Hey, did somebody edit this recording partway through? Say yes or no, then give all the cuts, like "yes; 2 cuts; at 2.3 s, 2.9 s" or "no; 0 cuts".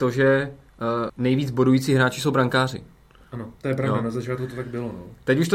yes; 2 cuts; at 1.1 s, 3.6 s